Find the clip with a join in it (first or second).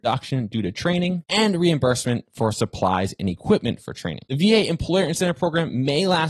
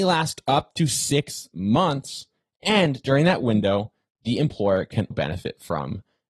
second